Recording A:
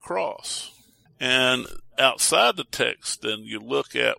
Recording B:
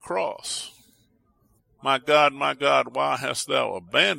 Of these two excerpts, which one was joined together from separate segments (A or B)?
A